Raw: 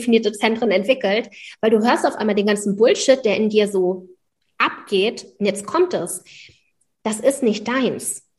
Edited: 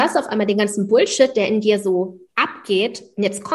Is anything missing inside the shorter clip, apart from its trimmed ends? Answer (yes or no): yes